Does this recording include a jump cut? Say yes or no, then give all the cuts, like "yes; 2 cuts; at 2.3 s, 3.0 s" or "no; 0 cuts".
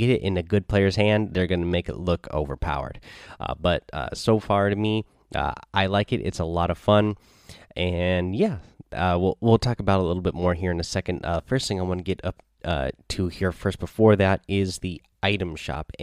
no; 0 cuts